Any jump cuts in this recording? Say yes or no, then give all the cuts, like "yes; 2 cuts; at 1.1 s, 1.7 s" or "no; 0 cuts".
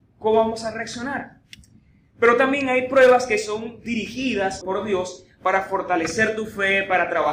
yes; 1 cut; at 4.6 s